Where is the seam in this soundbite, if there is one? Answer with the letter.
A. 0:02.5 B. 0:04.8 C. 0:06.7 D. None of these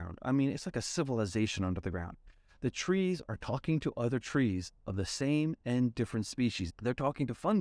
C